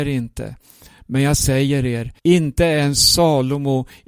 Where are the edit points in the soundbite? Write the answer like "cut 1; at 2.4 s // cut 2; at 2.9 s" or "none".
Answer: cut 1; at 2.2 s